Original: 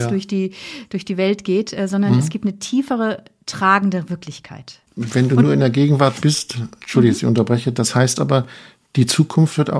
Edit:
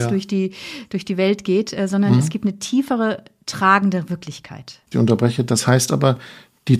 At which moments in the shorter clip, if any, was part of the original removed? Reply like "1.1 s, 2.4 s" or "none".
4.9 s

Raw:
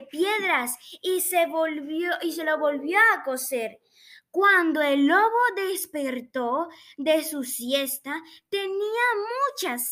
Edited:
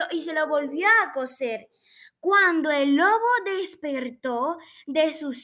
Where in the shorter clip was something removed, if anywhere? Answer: none

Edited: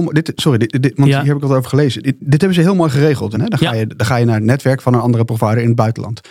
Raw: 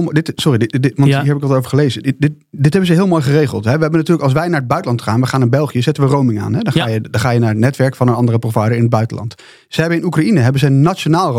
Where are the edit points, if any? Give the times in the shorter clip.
2.2 s, 3.3 s

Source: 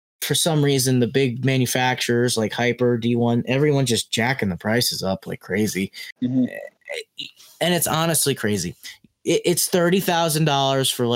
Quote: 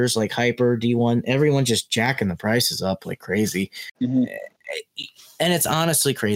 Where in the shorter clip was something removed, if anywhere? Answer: none

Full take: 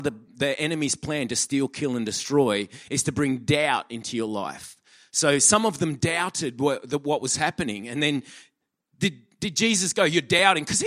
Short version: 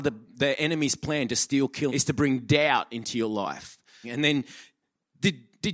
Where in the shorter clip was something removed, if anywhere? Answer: 1.9 s, 4.0 s

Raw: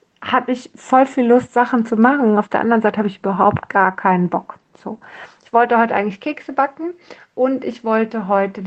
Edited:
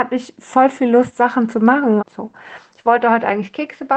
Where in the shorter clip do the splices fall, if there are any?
2.0 s

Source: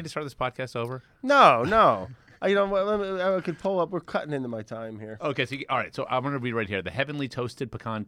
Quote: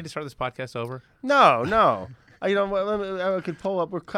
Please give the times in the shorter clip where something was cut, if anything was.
none

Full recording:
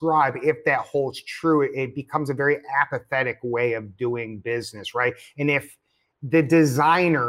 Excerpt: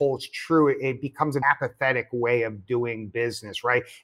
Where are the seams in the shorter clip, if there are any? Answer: 1.4 s

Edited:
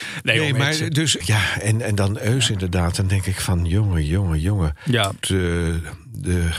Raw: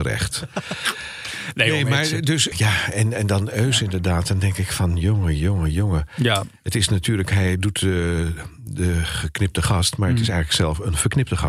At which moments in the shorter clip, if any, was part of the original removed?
5.2 s

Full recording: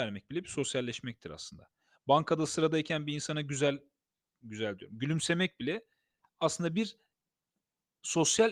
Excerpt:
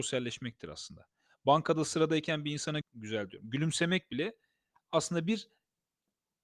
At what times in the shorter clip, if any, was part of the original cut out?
2.8 s

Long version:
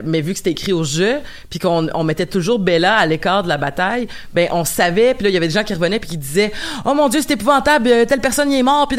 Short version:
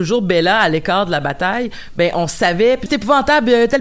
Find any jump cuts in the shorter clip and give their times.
2.9 s

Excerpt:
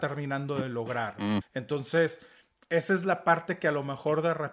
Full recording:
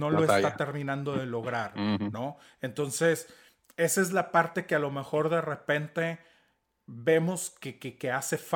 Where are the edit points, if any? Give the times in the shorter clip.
1.4 s

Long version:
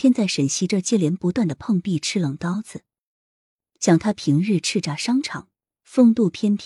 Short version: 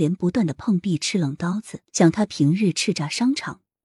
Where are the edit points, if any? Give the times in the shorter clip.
1.8 s

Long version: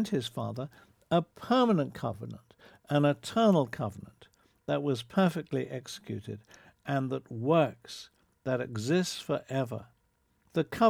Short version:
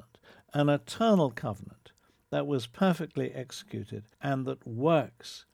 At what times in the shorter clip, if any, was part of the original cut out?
4.1 s

